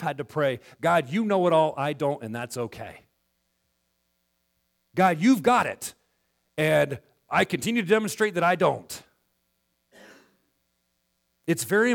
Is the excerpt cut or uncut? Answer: uncut